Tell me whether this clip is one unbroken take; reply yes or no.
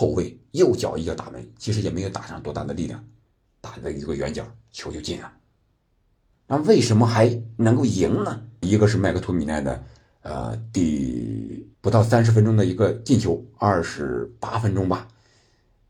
no